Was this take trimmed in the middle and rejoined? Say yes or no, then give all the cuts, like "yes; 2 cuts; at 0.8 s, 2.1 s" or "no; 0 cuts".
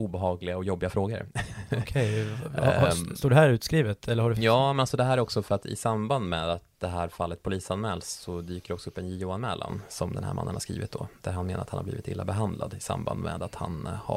no; 0 cuts